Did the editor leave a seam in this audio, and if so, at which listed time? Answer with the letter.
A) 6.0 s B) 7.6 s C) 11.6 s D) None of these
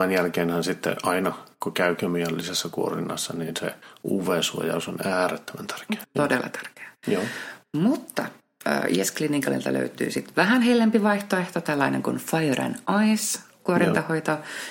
A